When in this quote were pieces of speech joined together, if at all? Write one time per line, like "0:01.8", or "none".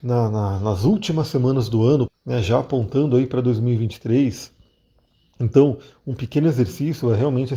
0:02.1